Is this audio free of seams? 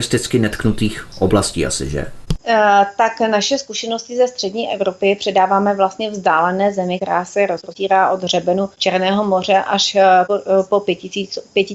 yes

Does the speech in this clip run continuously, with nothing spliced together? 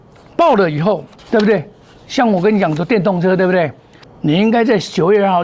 no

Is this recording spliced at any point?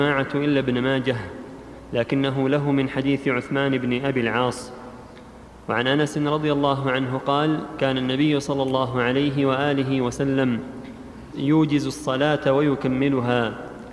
yes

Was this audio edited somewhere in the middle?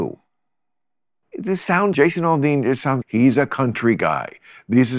yes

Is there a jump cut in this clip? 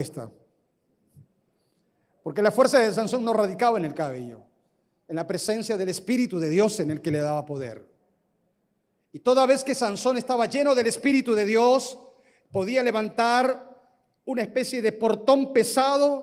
no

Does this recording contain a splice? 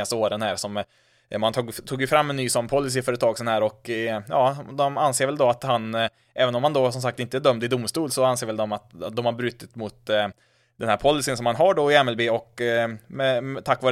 no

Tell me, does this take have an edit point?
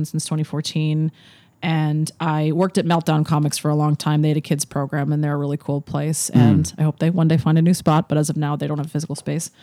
no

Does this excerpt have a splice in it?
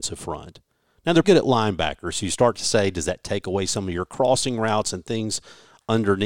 yes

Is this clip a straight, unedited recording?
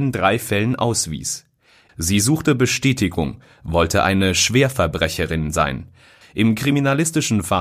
no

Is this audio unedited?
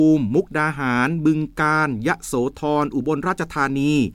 yes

